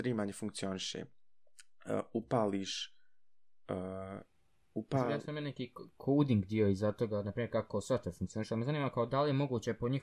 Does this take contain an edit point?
no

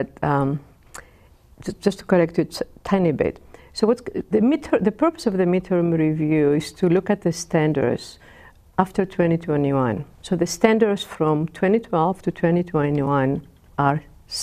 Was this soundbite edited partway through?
no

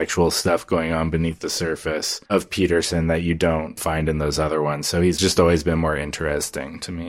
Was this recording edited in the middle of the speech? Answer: no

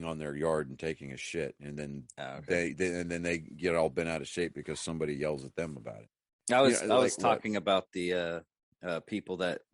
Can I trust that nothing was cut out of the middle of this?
yes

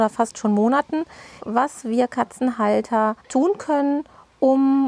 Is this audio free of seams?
no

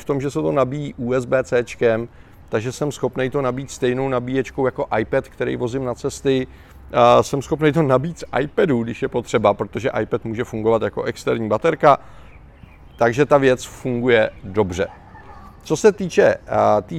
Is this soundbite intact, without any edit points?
yes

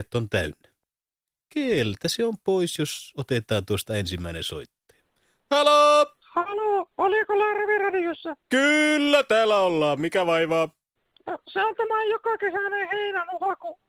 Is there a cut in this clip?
no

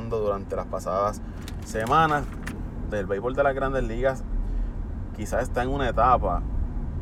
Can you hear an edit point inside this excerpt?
yes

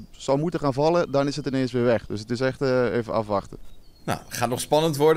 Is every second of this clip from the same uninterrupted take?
yes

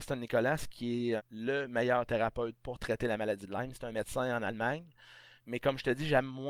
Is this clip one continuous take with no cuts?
no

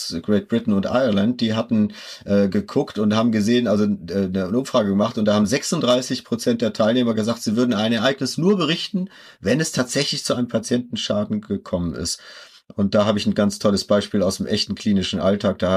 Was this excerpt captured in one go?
yes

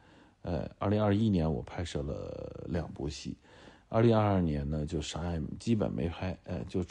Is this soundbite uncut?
yes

